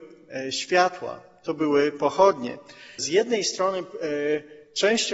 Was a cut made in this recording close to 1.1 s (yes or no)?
no